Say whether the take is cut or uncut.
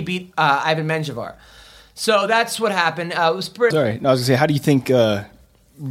cut